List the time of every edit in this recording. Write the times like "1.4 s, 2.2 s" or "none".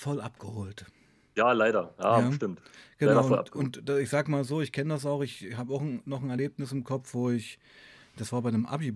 none